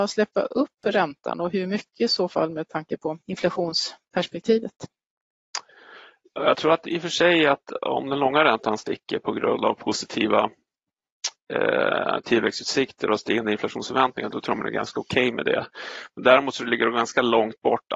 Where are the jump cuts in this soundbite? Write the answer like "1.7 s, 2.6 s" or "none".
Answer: 3.2 s

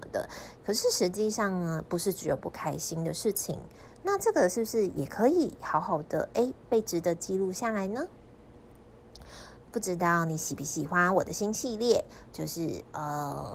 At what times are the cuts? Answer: 3.9 s

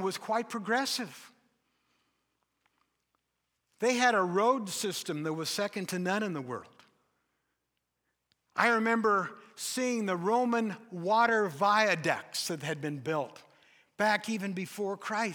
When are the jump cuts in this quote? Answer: none

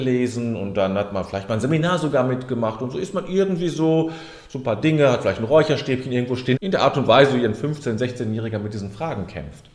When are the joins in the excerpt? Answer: 6.5 s

